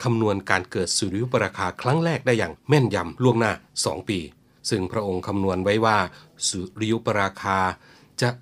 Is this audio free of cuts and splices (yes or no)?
yes